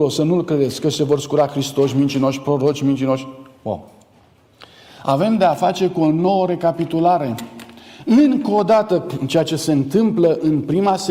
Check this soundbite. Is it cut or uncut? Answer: uncut